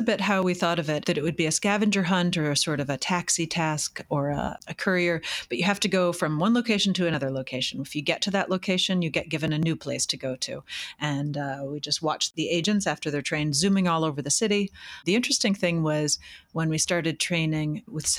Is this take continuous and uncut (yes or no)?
yes